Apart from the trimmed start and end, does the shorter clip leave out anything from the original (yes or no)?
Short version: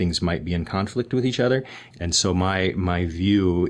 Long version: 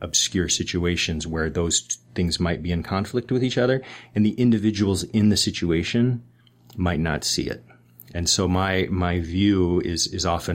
yes